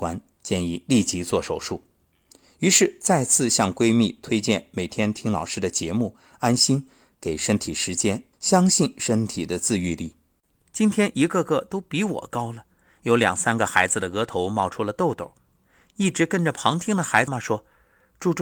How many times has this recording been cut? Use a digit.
3